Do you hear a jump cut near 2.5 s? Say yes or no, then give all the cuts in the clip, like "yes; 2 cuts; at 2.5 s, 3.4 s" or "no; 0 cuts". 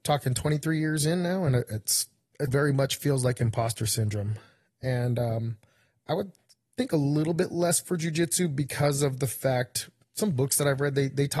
yes; 1 cut; at 2.5 s